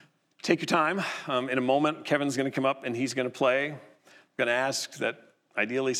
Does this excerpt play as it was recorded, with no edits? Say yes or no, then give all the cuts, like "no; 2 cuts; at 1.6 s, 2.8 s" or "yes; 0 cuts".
no; 1 cut; at 4.0 s